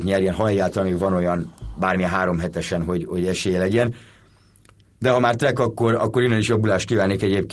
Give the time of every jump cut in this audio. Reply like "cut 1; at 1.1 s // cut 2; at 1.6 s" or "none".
none